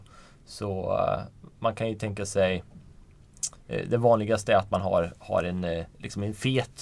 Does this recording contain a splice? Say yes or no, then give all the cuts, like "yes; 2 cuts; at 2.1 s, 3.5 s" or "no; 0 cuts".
yes; 1 cut; at 5.9 s